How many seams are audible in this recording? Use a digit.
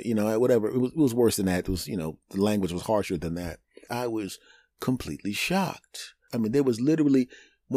2